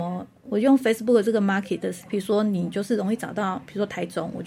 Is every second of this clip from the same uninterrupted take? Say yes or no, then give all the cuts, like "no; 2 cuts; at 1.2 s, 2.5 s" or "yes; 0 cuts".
no; 1 cut; at 2.1 s